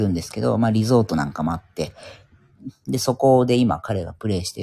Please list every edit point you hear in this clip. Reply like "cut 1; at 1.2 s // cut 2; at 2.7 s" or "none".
none